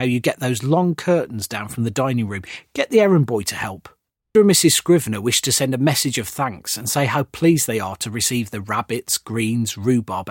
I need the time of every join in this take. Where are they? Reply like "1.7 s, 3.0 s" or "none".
4.3 s